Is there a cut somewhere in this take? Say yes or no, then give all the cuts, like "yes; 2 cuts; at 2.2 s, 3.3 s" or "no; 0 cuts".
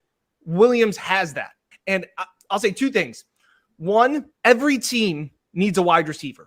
yes; 2 cuts; at 1.7 s, 4.3 s